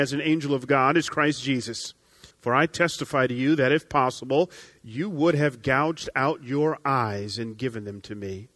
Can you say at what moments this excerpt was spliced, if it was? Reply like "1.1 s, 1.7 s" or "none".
2.3 s

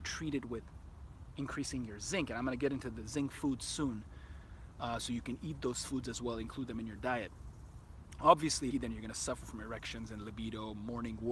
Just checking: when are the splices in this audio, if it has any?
8.7 s

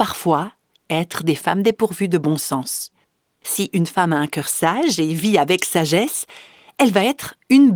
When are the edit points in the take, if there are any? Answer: 3.4 s

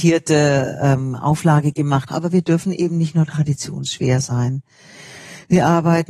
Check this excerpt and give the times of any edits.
2.1 s

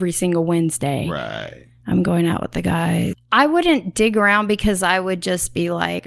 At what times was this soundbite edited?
3.1 s

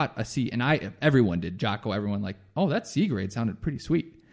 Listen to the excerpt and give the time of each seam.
none

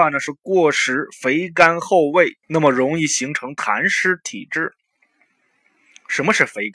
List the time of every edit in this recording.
2.4 s

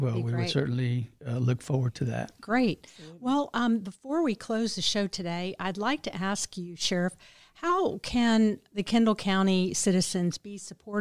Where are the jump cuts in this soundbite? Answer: none

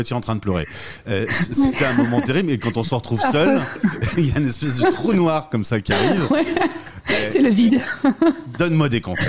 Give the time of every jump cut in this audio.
none

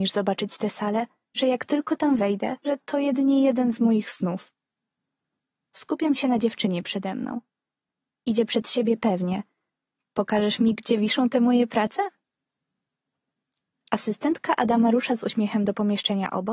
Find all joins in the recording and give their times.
1.4 s, 2.6 s, 9.9 s

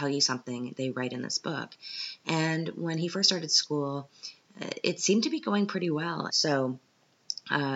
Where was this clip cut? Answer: 6.3 s

